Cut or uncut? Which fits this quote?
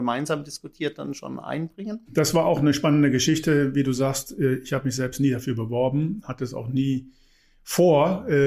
uncut